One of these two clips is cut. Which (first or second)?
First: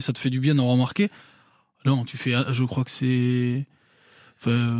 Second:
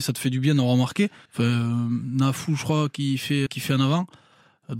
second